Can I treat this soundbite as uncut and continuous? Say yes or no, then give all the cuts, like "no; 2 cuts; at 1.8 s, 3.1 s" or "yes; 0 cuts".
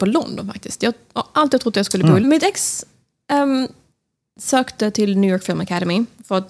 no; 1 cut; at 2.2 s